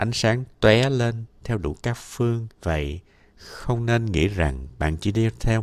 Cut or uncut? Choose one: cut